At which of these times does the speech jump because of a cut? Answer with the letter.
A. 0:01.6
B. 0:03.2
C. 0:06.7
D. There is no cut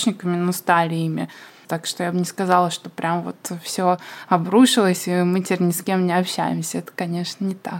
A